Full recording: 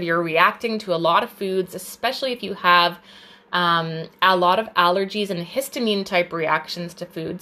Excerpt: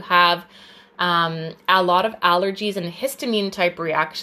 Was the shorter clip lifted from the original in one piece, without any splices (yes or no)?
yes